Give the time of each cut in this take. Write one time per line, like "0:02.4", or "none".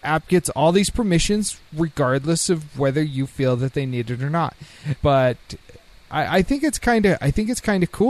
0:05.0